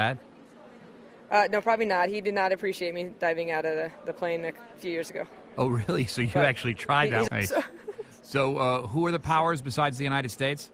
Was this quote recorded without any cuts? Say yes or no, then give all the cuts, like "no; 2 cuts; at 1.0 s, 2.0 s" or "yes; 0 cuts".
no; 1 cut; at 7.3 s